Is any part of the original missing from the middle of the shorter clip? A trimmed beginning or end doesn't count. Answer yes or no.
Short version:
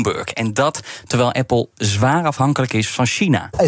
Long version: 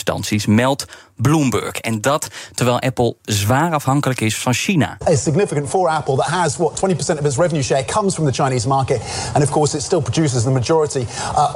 no